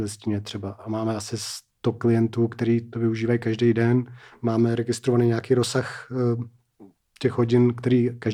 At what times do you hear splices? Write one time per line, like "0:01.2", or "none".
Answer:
none

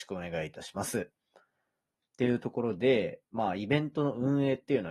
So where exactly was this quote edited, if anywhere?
0:02.0

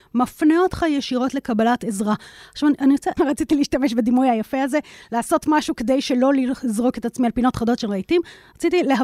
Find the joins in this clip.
0:03.2

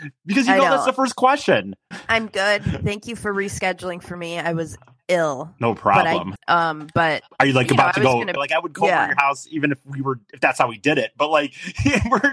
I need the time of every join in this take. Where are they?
0:01.9
0:06.4
0:08.4

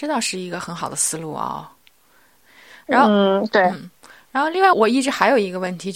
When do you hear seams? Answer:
0:04.7

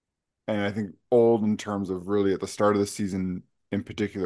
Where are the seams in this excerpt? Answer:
none

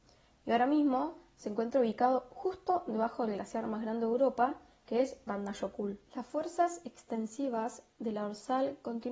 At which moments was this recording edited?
0:06.1

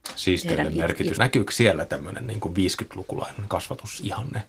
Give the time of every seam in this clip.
0:01.1

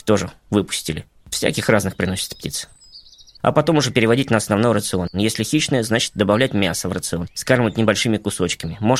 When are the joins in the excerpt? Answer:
0:03.4

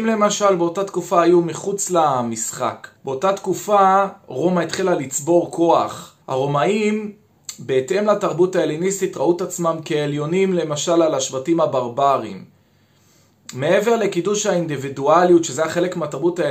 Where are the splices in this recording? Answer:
0:03.0
0:06.2

